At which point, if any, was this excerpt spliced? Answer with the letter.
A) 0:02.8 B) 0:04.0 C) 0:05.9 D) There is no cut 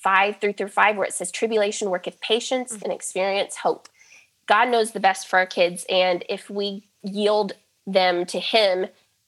A